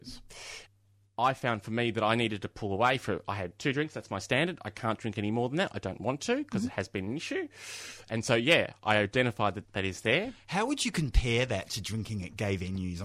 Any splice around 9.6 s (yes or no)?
yes